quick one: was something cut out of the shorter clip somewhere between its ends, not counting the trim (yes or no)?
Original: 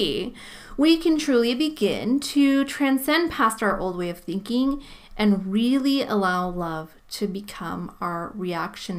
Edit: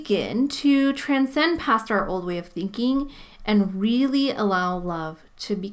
no